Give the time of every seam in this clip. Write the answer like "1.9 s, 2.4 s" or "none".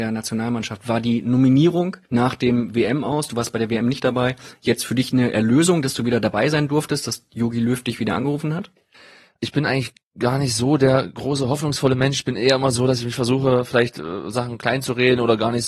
none